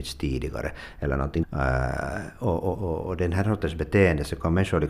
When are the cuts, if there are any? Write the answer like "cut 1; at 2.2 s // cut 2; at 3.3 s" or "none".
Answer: cut 1; at 1.4 s // cut 2; at 2.7 s